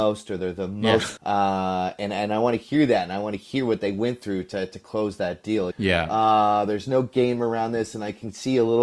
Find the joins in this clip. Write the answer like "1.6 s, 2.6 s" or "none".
1.2 s, 5.7 s